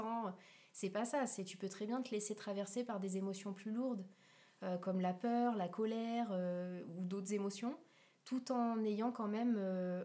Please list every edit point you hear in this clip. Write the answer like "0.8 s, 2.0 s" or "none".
none